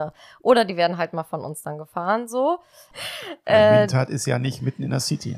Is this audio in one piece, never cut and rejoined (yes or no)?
no